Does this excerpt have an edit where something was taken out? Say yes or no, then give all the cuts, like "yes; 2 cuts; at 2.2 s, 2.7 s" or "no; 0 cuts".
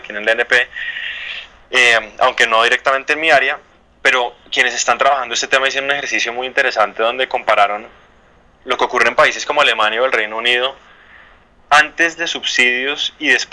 no; 0 cuts